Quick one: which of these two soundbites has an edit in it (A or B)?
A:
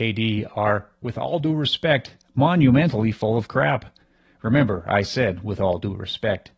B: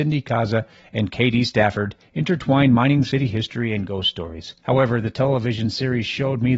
B